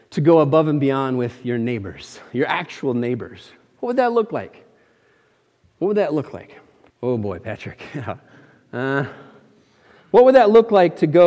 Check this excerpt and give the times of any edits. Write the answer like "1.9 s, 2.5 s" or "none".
6.9 s

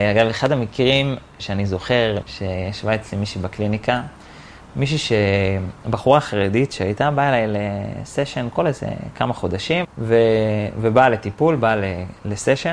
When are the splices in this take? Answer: 2.2 s, 9.8 s

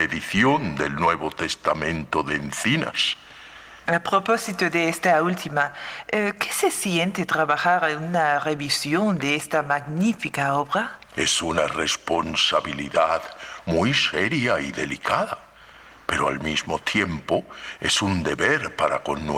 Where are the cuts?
3.9 s

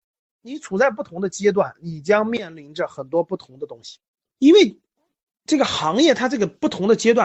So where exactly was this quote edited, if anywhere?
4.3 s

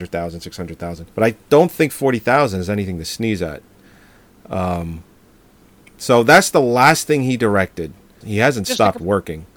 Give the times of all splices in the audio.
1.1 s, 8.2 s

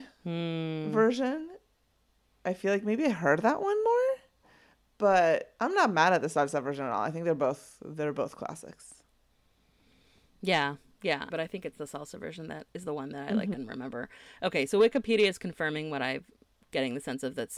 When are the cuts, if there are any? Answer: 11.3 s, 13.5 s

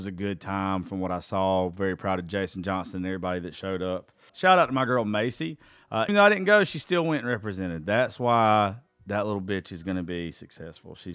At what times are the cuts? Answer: 4.3 s, 6.1 s

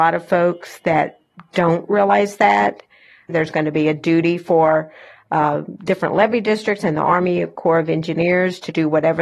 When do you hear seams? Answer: 3.3 s

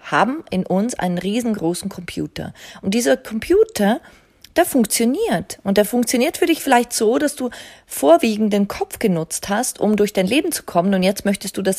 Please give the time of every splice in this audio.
none

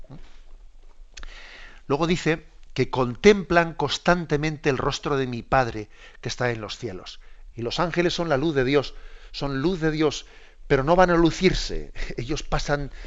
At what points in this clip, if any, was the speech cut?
7.5 s

